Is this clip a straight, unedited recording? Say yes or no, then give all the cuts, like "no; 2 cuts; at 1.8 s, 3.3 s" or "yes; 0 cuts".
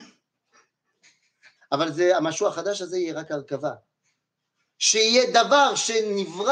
no; 1 cut; at 1.6 s